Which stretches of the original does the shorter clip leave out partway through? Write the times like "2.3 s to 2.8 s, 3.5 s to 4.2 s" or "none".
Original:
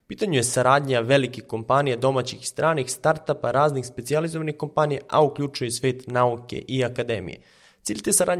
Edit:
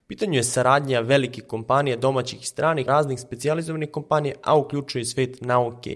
2.9 s to 3.5 s